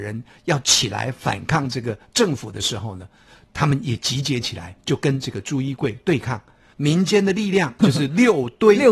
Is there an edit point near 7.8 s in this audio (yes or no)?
yes